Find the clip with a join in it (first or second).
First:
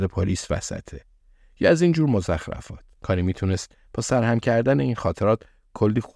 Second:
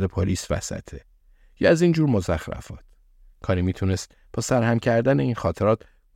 first